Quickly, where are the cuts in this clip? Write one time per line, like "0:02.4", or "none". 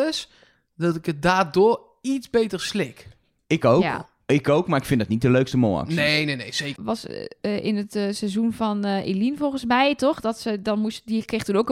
0:06.8